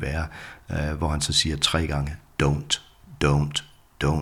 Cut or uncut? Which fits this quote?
uncut